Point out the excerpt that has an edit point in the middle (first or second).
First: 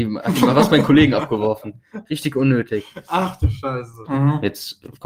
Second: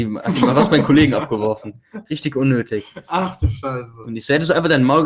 first